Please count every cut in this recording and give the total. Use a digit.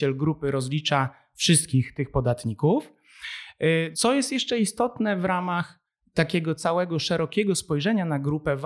1